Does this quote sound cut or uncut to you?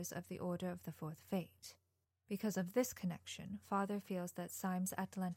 uncut